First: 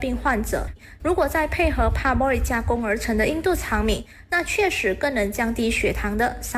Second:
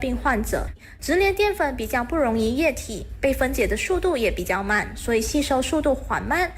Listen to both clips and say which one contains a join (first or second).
second